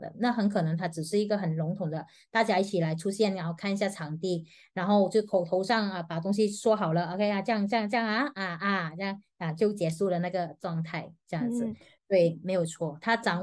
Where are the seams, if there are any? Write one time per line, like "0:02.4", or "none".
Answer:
0:12.0